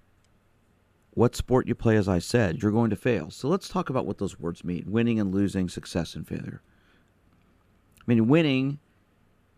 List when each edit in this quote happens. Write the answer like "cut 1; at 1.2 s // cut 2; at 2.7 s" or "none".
cut 1; at 2.6 s